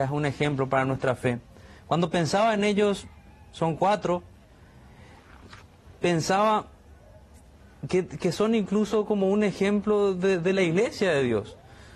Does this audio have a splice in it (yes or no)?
no